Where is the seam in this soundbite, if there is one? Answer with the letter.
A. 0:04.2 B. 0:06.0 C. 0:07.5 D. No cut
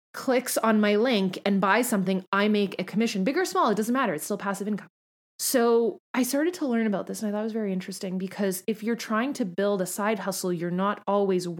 B